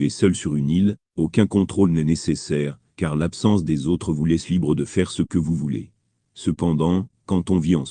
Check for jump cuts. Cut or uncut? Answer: uncut